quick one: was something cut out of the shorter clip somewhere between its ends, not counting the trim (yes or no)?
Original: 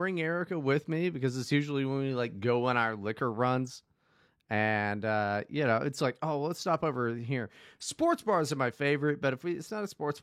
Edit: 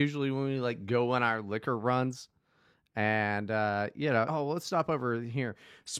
yes